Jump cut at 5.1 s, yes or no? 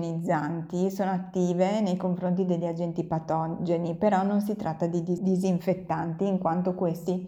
no